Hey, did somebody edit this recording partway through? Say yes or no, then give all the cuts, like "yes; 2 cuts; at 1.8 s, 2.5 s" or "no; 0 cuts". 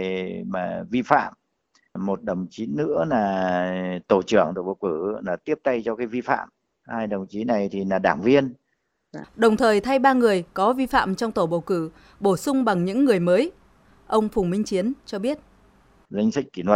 yes; 1 cut; at 9.2 s